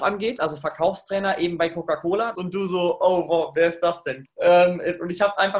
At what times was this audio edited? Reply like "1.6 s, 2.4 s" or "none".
2.3 s, 4.2 s